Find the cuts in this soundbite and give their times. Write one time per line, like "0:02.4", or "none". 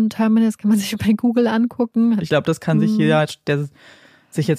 0:02.2